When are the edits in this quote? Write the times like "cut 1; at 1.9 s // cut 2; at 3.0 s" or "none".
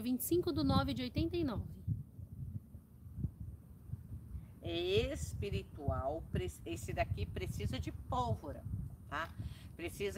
none